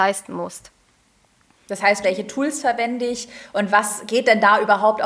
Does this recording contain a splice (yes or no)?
yes